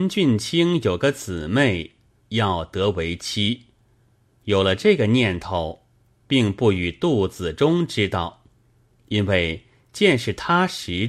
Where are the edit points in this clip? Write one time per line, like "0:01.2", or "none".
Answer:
0:02.2